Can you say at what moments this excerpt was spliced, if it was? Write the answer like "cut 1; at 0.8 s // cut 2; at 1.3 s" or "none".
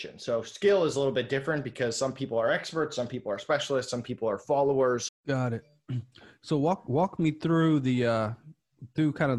cut 1; at 5.1 s